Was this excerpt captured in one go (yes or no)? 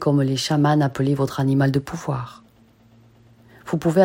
yes